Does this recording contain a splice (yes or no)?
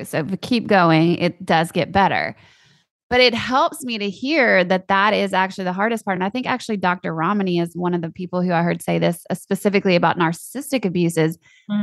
no